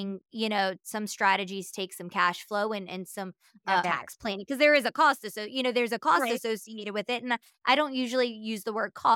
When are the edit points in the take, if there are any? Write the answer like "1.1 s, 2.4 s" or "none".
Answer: 3.8 s